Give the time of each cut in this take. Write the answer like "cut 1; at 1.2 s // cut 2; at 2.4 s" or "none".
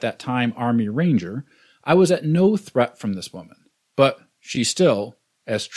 none